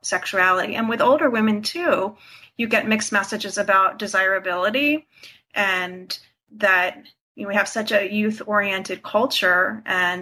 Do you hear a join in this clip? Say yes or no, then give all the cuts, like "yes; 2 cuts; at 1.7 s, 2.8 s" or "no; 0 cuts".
no; 0 cuts